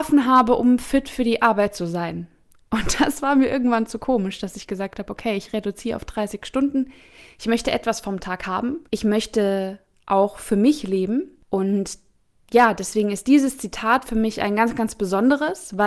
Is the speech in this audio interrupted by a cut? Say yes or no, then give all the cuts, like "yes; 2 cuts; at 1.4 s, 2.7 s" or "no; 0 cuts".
no; 0 cuts